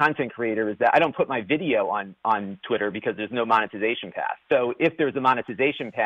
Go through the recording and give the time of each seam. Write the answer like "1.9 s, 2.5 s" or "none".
4.4 s